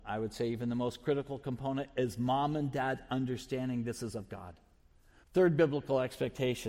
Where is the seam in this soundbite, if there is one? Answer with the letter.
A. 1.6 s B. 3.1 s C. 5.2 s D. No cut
C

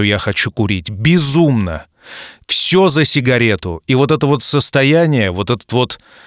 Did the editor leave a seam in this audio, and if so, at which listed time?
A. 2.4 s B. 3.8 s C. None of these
C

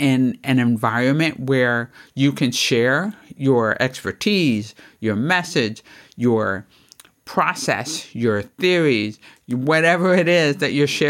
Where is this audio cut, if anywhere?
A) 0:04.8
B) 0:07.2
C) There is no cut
C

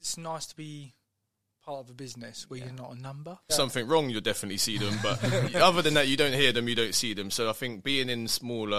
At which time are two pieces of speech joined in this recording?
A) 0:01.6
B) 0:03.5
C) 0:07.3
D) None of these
B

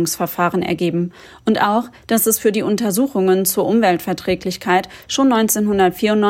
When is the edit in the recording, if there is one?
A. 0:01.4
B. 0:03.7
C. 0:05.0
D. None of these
D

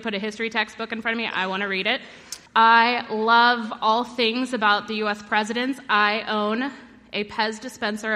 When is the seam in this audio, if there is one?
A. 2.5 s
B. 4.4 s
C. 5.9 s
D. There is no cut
A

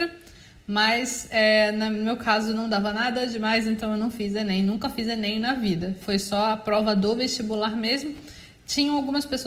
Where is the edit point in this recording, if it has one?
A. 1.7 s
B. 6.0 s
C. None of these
B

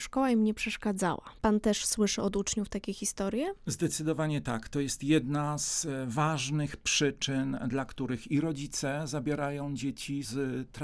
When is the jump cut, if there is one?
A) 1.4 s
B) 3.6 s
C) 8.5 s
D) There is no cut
A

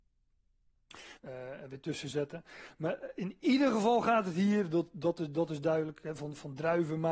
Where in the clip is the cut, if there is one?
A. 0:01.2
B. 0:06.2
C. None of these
A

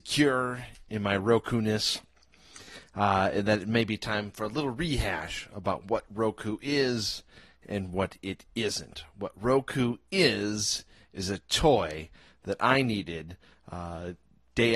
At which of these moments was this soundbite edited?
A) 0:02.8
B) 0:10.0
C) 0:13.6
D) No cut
D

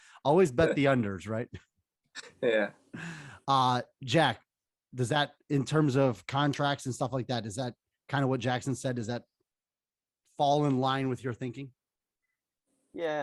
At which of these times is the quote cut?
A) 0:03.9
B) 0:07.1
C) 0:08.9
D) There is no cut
D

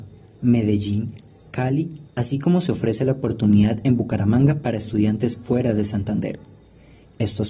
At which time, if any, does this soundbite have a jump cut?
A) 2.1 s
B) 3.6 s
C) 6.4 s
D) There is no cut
A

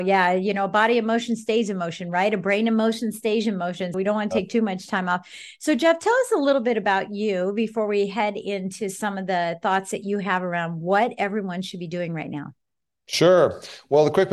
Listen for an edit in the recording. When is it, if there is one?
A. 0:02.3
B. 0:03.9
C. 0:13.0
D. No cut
B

